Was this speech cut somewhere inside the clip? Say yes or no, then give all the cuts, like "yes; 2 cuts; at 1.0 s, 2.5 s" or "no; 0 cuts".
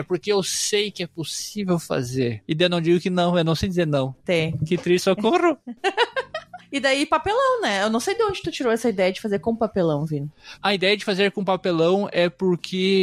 yes; 1 cut; at 4.2 s